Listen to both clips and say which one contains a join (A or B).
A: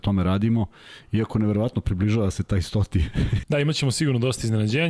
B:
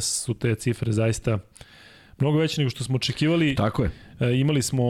A